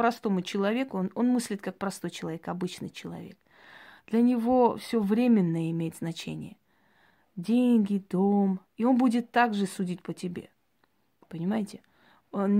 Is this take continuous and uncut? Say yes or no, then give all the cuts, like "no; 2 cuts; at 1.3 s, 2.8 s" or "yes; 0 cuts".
yes; 0 cuts